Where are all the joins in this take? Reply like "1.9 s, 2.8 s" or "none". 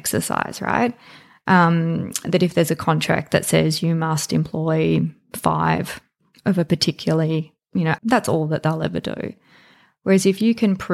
8.0 s